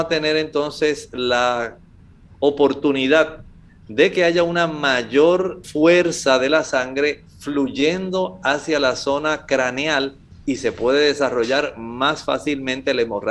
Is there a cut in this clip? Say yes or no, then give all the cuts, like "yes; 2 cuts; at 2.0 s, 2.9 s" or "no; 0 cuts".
yes; 1 cut; at 5.6 s